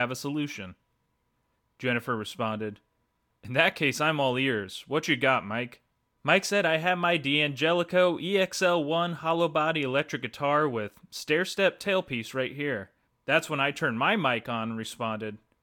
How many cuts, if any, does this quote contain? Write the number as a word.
one